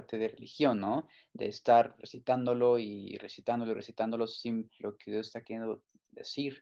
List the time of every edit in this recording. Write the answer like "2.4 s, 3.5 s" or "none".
4.8 s